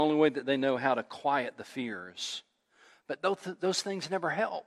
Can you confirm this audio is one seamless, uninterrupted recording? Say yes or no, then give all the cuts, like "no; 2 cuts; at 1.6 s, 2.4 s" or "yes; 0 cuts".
yes; 0 cuts